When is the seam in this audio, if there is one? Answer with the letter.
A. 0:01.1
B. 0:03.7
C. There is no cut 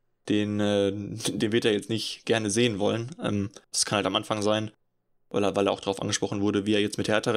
B